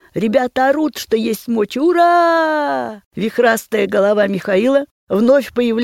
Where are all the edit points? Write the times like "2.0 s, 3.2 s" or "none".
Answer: none